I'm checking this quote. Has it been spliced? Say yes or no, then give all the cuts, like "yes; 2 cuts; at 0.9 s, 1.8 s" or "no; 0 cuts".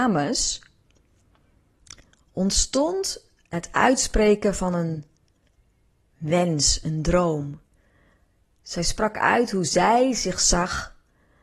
no; 0 cuts